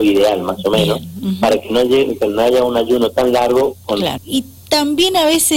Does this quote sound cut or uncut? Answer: cut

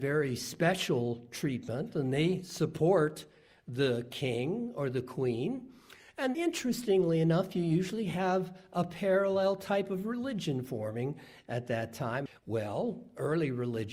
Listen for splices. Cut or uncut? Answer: cut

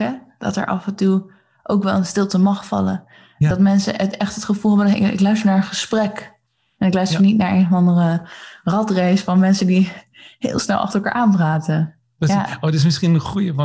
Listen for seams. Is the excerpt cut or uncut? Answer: uncut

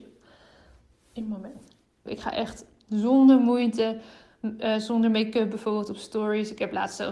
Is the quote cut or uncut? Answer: cut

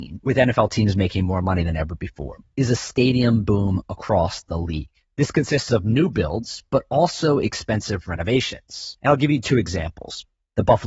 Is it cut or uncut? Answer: uncut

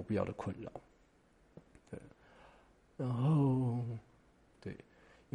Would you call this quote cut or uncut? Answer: cut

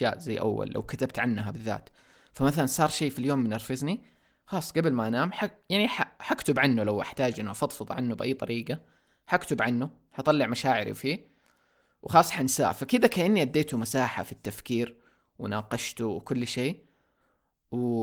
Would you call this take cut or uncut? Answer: uncut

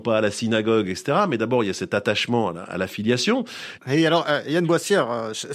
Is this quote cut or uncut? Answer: cut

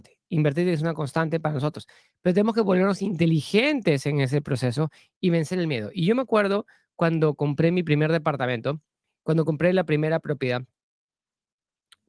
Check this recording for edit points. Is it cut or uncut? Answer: uncut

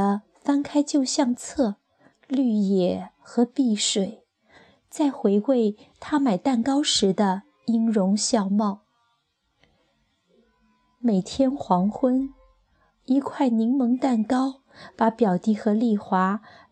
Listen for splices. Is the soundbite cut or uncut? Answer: cut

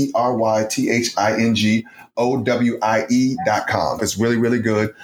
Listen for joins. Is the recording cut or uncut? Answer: cut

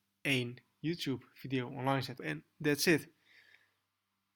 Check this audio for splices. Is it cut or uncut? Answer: cut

